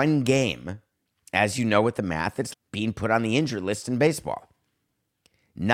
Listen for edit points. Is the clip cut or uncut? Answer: cut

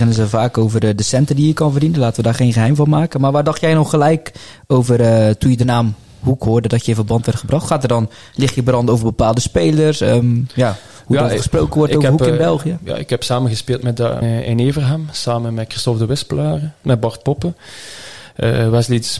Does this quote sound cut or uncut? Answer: cut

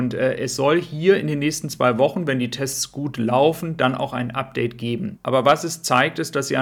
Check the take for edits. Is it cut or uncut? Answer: cut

